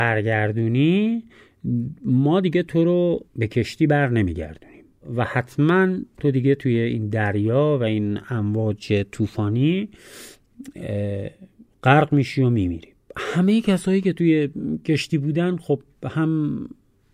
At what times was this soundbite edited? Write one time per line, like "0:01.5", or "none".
0:03.3